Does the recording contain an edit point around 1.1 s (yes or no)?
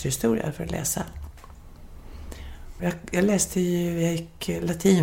no